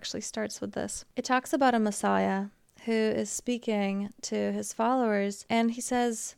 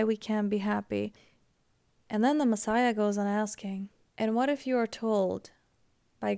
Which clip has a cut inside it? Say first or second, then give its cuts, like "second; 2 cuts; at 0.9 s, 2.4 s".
second; 1 cut; at 2.0 s